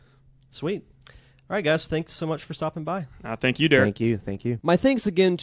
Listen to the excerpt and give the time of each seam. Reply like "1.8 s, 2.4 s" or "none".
none